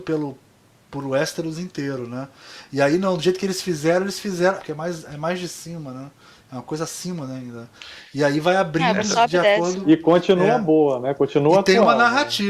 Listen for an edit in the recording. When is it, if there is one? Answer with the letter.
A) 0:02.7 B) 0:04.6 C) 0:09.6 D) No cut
B